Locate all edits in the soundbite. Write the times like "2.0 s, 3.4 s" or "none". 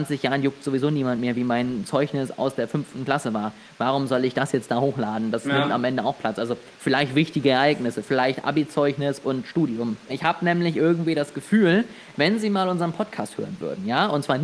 10.1 s, 12.1 s